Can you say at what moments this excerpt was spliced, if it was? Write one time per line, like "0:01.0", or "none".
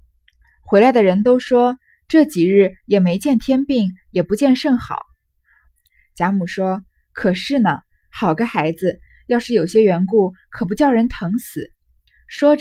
0:05.6